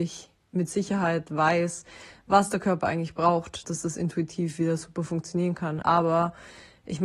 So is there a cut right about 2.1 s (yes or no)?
no